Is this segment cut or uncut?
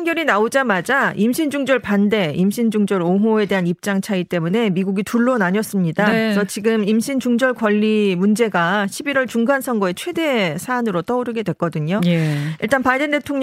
uncut